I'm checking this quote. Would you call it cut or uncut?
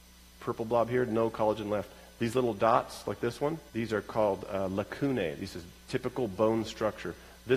cut